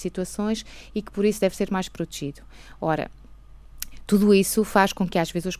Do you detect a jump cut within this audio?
no; 0 cuts

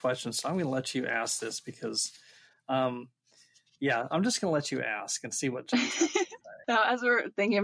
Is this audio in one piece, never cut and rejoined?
no; 1 cut; at 6.6 s

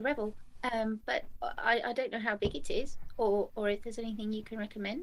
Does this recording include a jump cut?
no; 0 cuts

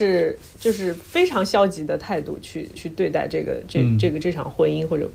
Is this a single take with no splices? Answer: no; 1 cut; at 2.8 s

